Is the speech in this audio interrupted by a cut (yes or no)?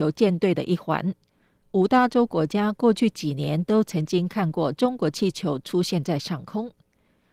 yes